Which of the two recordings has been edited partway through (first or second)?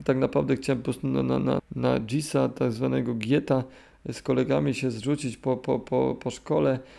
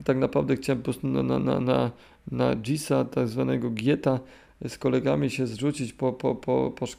first